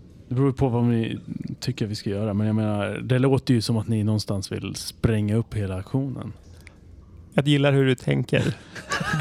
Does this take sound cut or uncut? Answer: uncut